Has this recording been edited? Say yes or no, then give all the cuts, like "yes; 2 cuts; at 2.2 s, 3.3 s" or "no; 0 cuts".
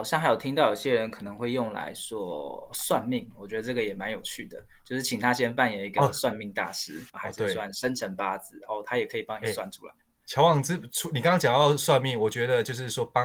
yes; 1 cut; at 7.1 s